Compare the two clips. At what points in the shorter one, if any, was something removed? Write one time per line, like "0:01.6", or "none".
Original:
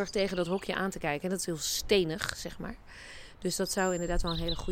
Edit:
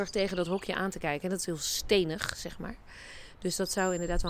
none